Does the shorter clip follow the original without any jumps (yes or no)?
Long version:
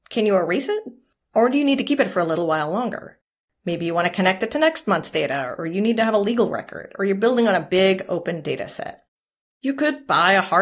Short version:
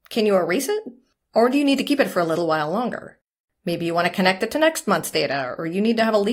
yes